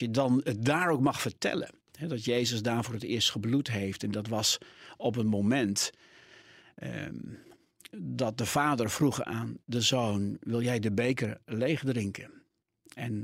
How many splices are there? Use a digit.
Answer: 0